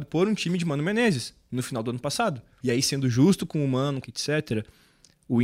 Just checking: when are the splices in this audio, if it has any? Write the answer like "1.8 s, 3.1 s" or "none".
2.6 s, 4.0 s